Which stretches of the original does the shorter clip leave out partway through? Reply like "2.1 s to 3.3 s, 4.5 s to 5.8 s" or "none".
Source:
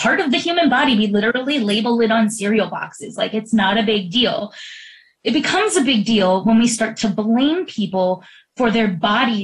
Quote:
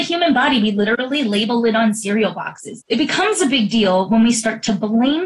3.2 s to 5.2 s